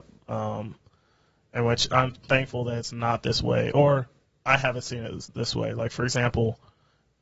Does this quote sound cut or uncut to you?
uncut